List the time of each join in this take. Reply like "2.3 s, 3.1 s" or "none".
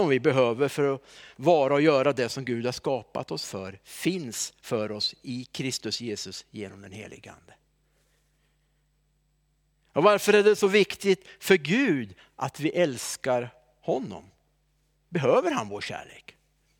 none

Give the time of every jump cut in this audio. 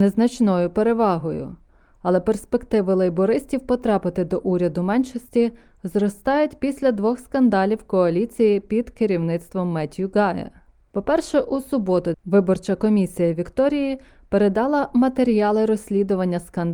12.1 s

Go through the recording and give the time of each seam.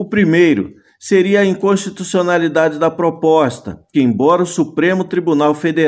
3.9 s

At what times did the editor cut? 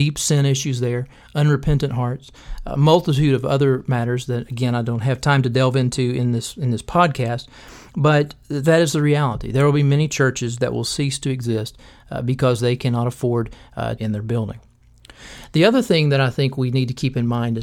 14.0 s

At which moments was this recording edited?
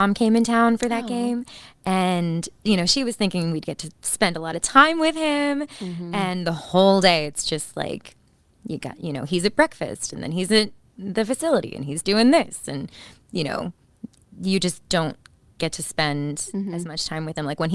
none

